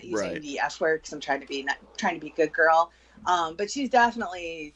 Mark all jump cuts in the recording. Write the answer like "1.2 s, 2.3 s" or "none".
none